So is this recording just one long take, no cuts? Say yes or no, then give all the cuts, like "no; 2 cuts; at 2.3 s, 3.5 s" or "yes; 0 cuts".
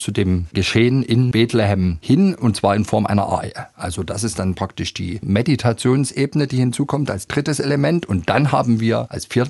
yes; 0 cuts